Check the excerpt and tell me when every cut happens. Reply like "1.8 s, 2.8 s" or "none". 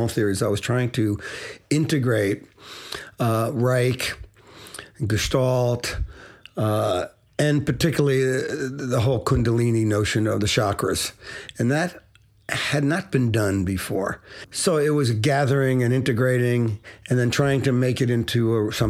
13.1 s